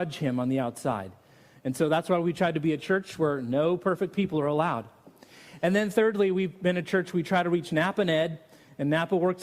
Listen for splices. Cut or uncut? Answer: uncut